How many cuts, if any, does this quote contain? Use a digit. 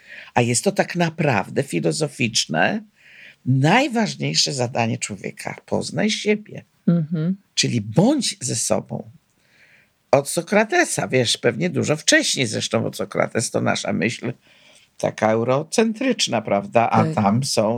0